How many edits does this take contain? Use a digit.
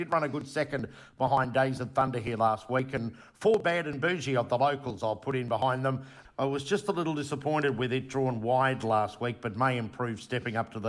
1